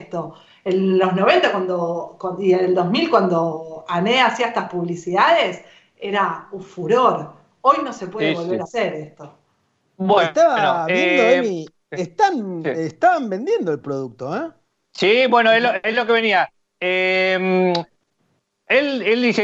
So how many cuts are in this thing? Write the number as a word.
zero